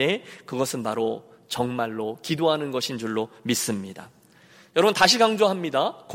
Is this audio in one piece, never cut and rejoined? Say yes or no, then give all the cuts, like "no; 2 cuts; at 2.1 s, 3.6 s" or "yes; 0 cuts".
yes; 0 cuts